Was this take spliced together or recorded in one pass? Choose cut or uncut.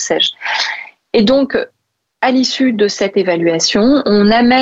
uncut